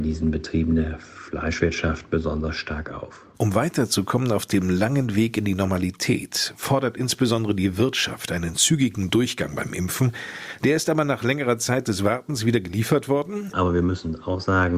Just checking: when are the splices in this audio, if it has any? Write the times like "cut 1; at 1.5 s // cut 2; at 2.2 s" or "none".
cut 1; at 3.3 s // cut 2; at 10.6 s // cut 3; at 13.5 s